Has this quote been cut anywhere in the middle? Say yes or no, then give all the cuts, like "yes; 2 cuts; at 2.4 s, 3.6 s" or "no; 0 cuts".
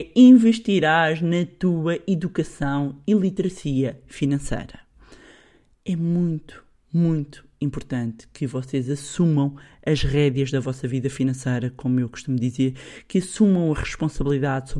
no; 0 cuts